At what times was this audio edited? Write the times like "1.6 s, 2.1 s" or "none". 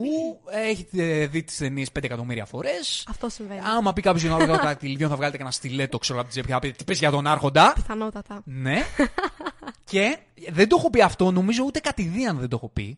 none